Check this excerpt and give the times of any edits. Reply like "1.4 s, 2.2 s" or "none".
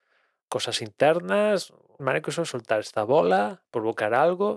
2.0 s